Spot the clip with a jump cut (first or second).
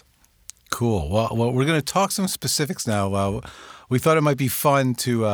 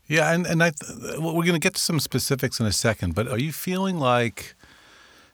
second